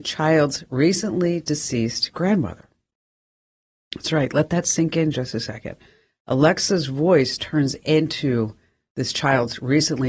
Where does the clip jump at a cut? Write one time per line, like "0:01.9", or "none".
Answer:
none

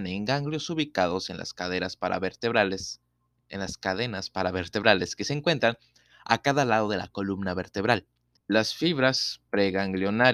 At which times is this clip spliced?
0:08.4

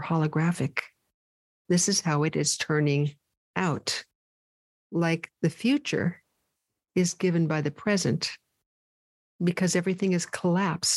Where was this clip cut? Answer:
0:01.6

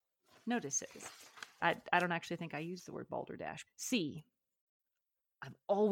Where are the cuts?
0:01.6
0:03.7

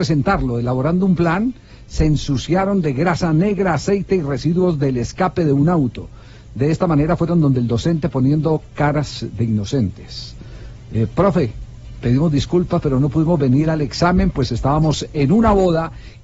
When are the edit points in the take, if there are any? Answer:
none

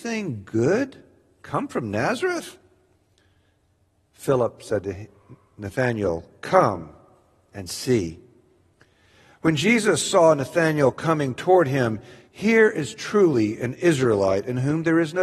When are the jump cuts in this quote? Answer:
0:12.3

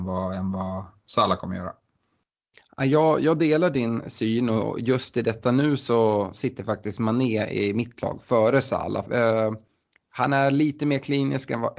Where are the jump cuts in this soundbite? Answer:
0:09.1

